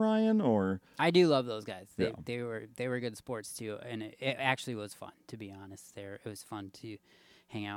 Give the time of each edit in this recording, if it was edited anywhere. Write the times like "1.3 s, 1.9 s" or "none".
none